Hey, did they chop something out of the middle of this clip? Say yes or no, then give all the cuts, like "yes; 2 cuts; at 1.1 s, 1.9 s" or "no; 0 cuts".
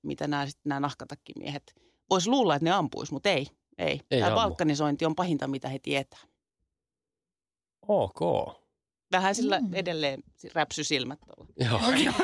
no; 0 cuts